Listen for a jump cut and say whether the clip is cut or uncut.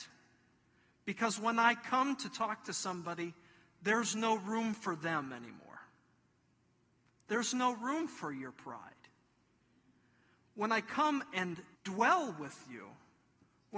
cut